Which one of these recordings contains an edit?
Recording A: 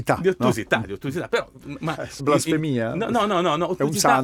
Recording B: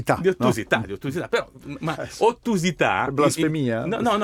A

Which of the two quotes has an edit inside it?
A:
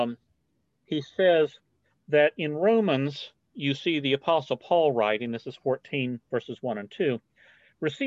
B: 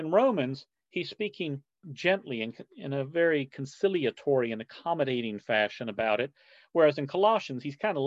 B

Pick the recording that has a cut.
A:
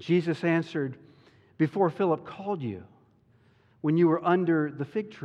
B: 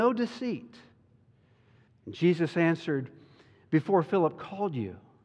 B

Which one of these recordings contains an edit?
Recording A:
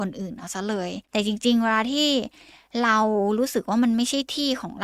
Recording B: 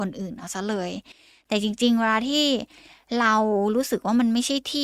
A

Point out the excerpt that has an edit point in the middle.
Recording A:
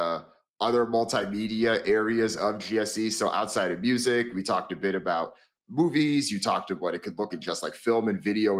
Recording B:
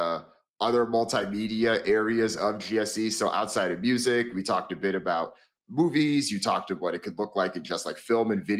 A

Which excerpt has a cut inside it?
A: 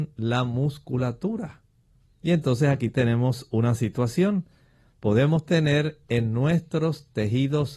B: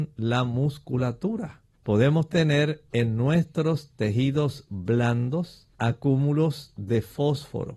B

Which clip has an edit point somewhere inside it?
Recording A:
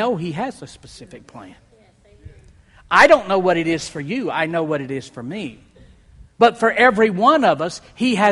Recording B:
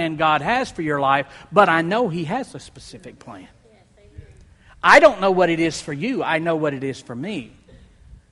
A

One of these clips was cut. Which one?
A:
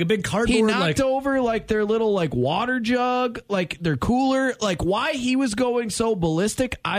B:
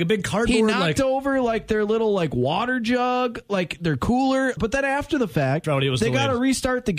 B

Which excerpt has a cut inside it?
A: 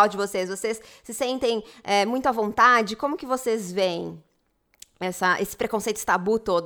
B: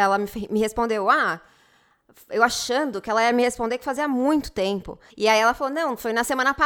B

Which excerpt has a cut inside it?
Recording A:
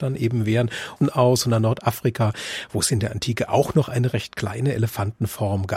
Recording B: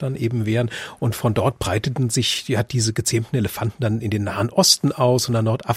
A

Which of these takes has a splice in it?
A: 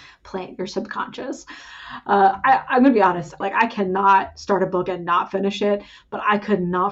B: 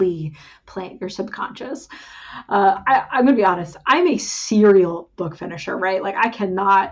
A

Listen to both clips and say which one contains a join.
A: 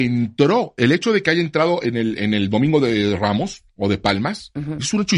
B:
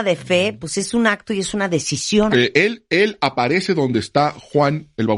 B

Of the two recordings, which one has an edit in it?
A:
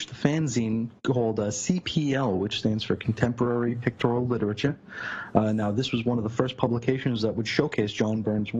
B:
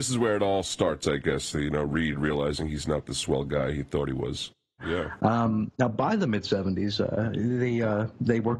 B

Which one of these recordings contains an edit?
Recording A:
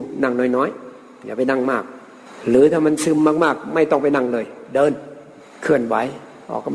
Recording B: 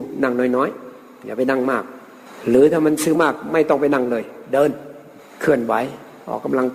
B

